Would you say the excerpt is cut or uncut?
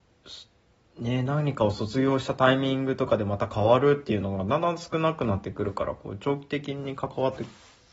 uncut